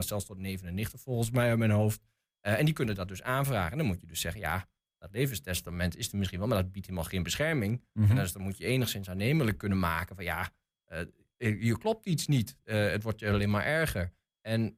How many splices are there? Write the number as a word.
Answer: zero